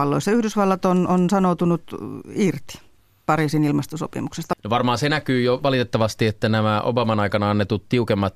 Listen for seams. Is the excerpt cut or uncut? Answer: uncut